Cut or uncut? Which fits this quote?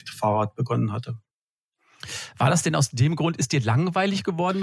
uncut